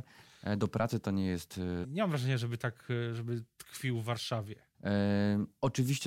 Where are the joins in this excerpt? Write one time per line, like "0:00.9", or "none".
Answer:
0:01.8
0:04.7